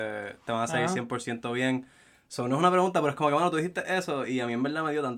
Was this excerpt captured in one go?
yes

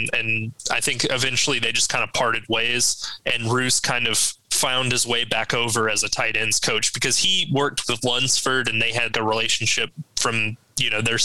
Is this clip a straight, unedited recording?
no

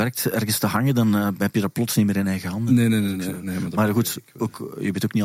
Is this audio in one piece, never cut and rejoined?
yes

